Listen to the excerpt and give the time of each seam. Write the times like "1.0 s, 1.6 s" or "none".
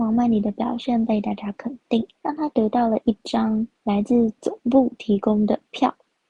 2.1 s, 3.8 s